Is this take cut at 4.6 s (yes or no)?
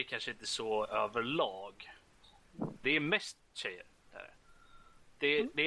no